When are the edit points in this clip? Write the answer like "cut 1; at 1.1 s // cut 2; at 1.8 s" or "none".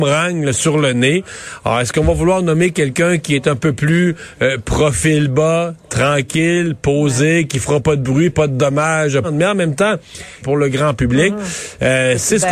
cut 1; at 9.2 s // cut 2; at 10.4 s